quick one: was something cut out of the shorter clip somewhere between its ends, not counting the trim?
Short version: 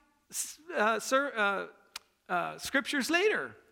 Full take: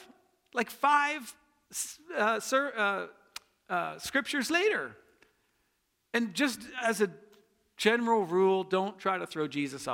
no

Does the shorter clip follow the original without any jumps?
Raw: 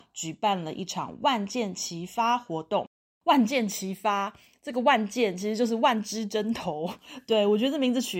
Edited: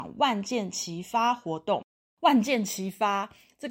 yes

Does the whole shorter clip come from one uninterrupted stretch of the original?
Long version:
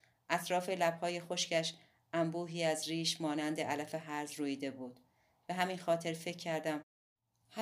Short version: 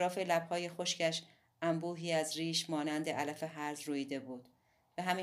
yes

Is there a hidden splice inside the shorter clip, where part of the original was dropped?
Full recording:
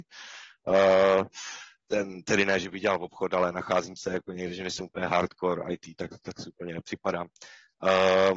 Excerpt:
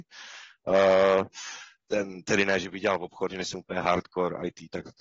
yes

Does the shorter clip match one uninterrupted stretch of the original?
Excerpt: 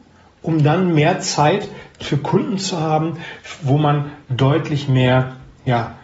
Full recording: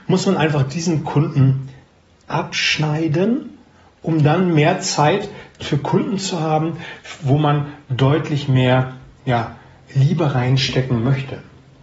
yes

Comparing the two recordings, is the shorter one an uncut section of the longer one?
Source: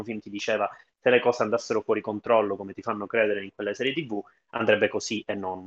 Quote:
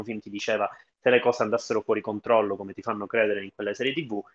yes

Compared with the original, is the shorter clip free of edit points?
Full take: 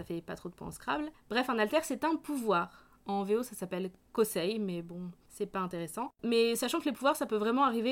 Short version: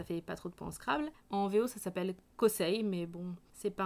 no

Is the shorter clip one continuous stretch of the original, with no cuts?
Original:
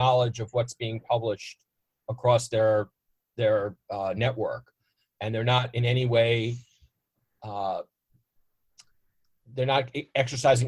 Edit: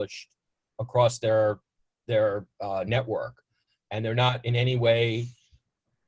yes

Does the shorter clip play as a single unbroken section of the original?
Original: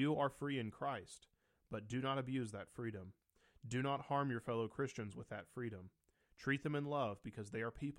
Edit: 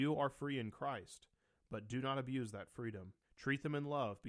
no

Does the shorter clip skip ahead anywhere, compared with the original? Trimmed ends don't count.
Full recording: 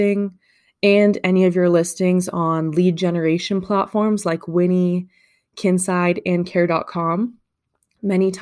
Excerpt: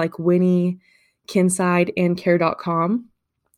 no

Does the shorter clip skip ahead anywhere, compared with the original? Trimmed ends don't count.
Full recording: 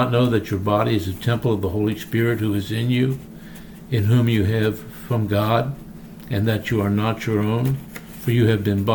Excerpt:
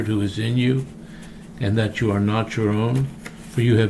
yes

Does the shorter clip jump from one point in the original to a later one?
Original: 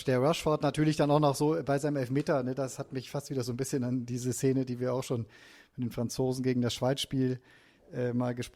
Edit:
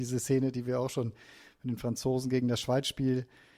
no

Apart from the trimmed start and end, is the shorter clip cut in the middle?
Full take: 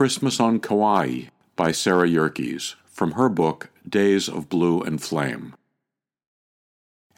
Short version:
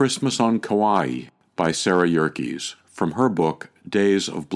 no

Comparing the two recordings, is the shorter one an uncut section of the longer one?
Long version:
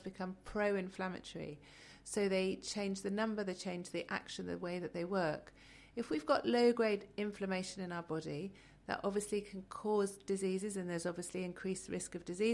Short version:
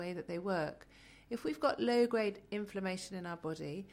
yes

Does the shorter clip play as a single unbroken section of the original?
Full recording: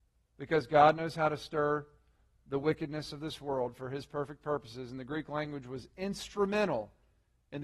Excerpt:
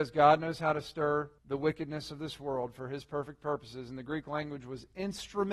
no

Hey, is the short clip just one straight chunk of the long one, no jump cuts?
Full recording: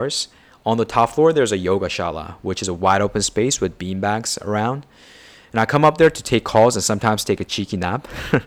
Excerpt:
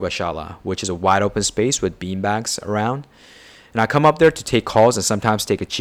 yes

